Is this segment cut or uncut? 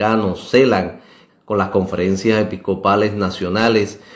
cut